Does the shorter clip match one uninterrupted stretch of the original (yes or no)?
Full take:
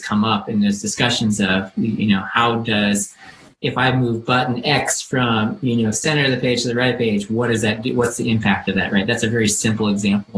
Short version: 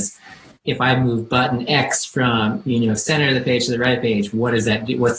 yes